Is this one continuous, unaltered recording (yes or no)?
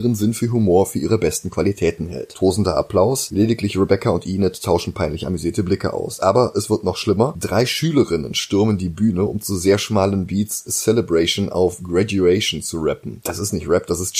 yes